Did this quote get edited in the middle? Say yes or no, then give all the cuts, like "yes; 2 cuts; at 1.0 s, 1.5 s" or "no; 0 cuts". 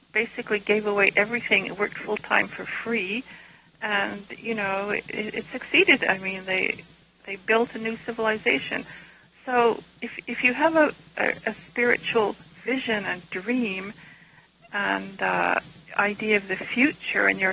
no; 0 cuts